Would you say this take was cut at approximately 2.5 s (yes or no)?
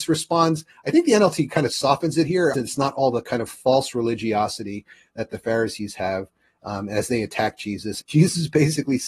yes